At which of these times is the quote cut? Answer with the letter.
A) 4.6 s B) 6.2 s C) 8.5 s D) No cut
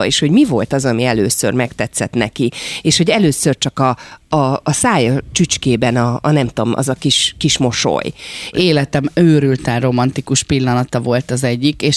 C